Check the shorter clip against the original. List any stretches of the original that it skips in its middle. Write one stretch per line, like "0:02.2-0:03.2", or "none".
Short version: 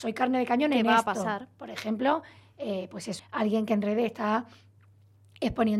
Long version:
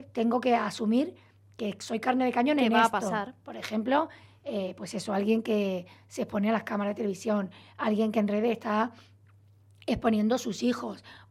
0:05.1-0:07.7